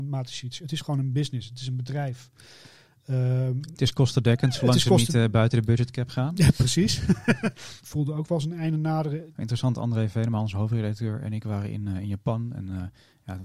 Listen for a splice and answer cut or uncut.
cut